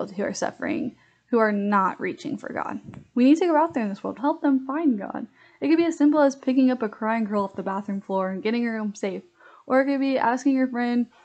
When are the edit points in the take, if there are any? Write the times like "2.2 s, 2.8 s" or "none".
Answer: 4.2 s